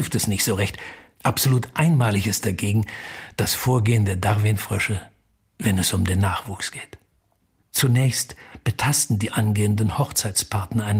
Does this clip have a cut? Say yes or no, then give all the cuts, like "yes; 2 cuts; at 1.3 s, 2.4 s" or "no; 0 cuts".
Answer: yes; 2 cuts; at 1.1 s, 7.6 s